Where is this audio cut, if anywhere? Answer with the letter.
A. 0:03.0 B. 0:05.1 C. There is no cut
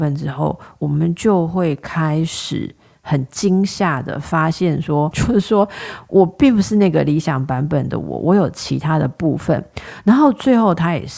B